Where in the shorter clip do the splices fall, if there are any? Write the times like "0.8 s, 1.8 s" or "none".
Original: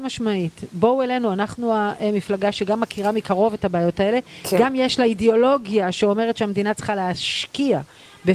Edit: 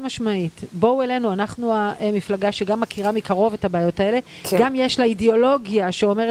none